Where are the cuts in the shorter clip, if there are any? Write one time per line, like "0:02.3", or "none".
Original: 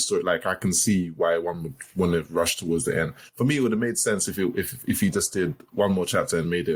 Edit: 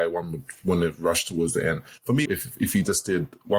0:02.3